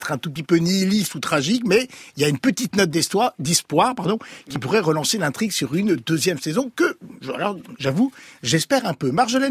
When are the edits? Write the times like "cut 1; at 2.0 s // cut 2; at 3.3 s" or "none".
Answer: none